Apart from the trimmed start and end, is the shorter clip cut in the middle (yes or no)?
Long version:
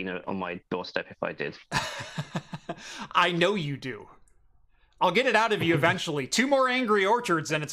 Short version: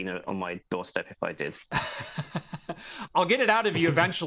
yes